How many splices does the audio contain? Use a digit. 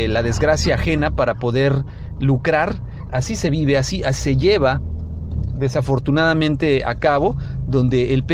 2